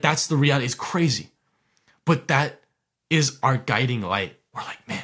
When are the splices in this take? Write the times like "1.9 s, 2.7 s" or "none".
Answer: none